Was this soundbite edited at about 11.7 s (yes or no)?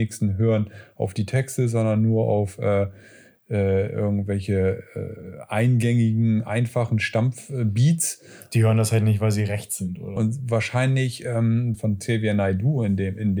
yes